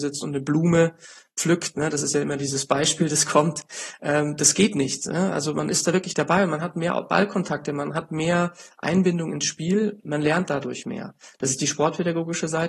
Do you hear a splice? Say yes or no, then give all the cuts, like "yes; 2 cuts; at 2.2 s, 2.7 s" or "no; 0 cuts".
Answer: no; 0 cuts